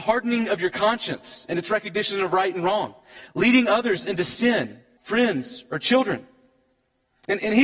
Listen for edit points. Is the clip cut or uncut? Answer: cut